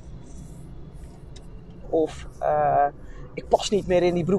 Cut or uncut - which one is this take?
cut